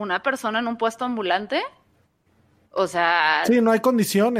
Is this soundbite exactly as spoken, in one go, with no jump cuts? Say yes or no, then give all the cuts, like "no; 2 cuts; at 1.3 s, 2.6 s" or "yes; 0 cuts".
yes; 0 cuts